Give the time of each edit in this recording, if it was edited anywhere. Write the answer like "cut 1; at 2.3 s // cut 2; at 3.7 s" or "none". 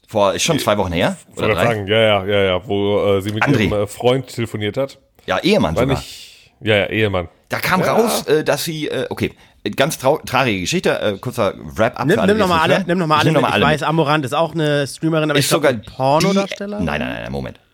none